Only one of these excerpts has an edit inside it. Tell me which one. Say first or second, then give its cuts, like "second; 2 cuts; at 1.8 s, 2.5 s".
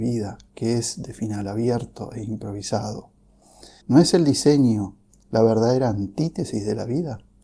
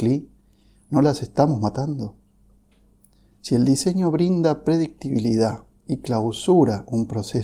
first; 1 cut; at 3.8 s